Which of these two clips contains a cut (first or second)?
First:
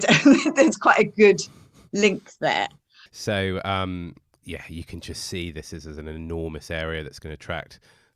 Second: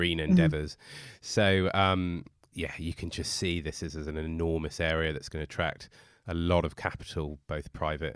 first